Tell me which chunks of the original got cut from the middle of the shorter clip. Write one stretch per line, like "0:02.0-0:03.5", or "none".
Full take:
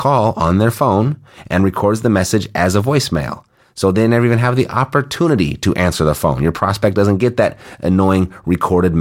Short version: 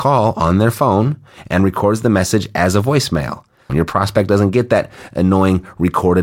0:03.7-0:06.4